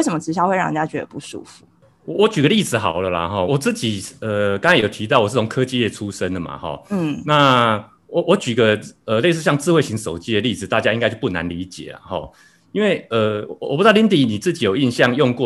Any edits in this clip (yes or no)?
yes